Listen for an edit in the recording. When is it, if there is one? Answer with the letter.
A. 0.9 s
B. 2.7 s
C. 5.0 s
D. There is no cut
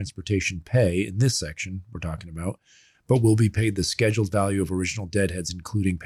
D